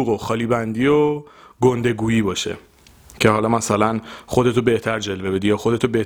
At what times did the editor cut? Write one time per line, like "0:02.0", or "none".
none